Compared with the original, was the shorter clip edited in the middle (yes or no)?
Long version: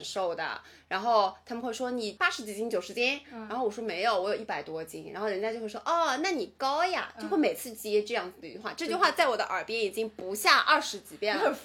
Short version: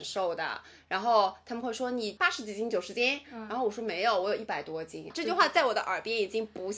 yes